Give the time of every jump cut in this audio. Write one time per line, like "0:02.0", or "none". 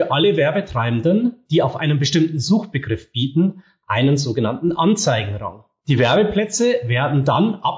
none